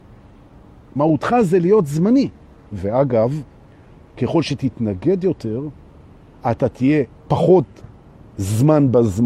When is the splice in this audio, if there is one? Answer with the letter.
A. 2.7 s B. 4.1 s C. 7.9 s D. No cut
A